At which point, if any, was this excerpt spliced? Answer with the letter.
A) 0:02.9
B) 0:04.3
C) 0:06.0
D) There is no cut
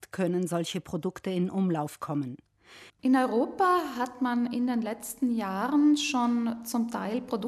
A